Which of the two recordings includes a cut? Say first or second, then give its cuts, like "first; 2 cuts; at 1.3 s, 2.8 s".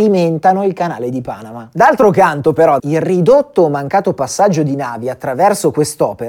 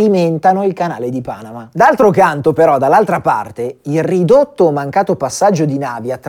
first; 1 cut; at 2.8 s